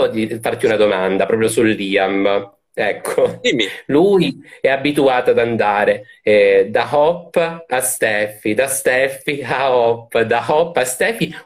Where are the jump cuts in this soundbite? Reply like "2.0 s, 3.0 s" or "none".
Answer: none